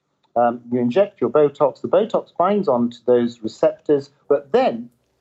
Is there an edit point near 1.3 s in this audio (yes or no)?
no